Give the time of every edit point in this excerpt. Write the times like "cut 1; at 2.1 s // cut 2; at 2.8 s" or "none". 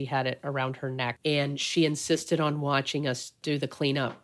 cut 1; at 1.2 s